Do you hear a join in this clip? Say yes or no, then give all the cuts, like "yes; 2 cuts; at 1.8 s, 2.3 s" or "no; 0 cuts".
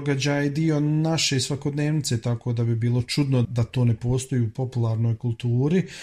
yes; 1 cut; at 3.4 s